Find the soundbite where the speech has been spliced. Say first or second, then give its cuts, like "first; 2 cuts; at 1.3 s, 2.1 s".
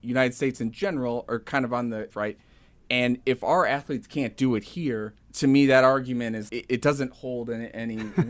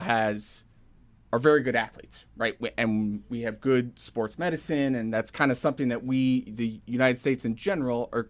first; 3 cuts; at 2.1 s, 5.2 s, 6.5 s